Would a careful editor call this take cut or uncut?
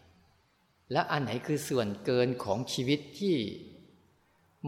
uncut